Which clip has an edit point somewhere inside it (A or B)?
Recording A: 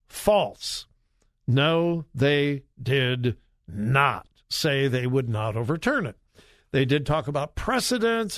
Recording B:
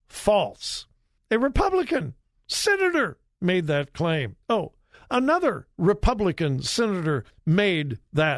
B